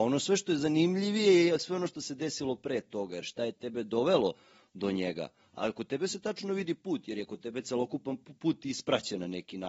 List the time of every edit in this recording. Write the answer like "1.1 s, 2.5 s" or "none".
none